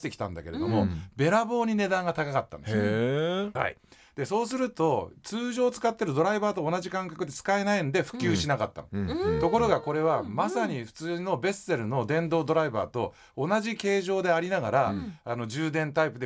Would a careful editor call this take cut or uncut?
cut